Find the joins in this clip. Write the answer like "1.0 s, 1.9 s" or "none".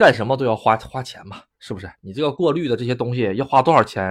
none

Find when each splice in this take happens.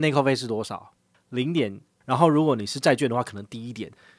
2.0 s

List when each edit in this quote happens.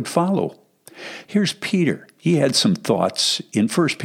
1.3 s

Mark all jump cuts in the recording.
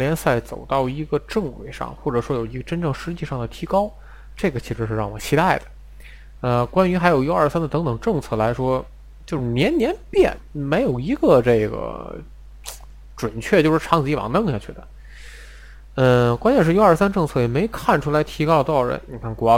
none

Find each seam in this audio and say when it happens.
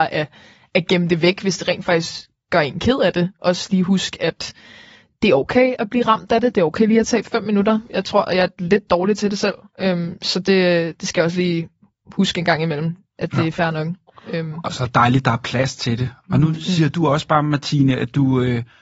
none

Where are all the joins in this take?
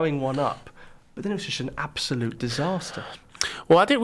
none

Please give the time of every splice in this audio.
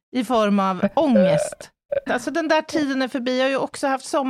2.1 s

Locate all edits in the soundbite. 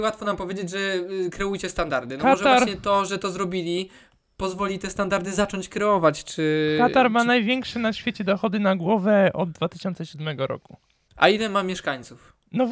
11.1 s

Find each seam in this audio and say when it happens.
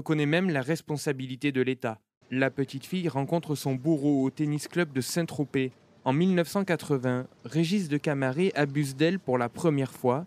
2.2 s

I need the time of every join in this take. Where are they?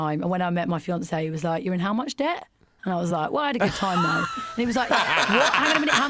none

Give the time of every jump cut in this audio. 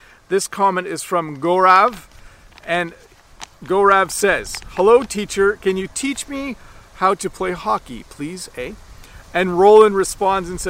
none

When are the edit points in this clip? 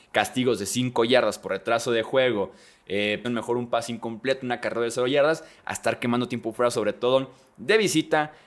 3.2 s

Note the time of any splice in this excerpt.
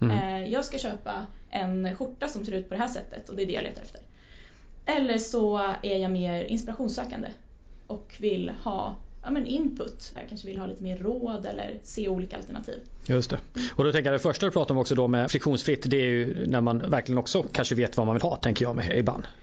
10.2 s, 15.3 s

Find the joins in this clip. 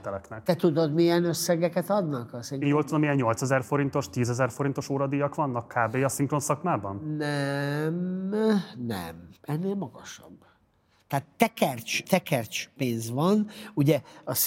9.4 s, 12.0 s

